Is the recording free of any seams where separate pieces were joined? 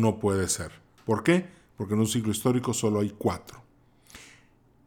yes; 0 cuts

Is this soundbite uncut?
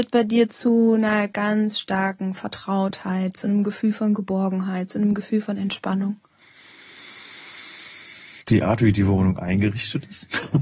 no; 1 cut; at 8.4 s

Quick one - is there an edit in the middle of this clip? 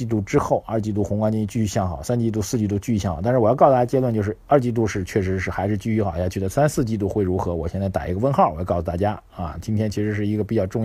no; 0 cuts

